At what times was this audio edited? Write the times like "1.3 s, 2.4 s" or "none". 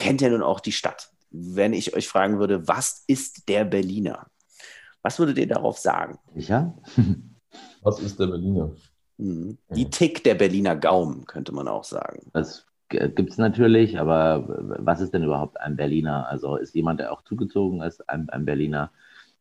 12.3 s